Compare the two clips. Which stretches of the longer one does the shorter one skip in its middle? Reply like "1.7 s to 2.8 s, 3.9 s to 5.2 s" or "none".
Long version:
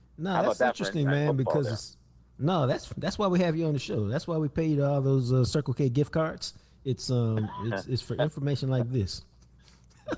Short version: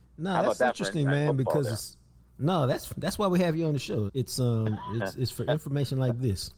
4.1 s to 6.8 s